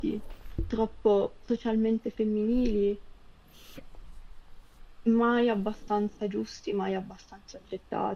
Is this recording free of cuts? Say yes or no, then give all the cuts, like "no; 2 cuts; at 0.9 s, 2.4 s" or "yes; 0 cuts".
yes; 0 cuts